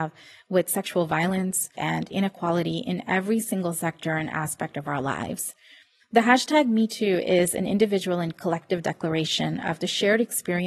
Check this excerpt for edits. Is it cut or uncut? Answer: cut